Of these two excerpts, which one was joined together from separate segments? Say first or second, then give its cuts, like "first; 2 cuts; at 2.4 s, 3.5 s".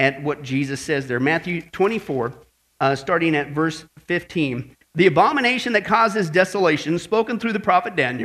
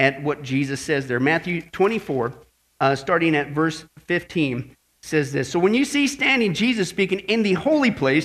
first; 1 cut; at 4.8 s